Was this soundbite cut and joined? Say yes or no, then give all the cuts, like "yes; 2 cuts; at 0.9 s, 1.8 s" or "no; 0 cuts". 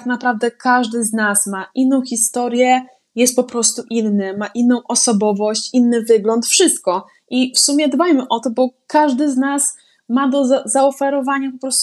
no; 0 cuts